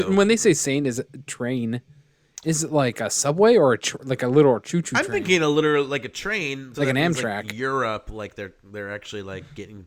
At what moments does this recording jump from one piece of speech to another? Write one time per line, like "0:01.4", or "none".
0:06.7